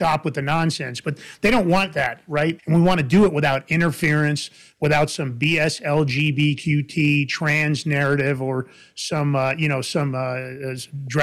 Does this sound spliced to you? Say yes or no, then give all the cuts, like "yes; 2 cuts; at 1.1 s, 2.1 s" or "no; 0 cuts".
yes; 1 cut; at 2.6 s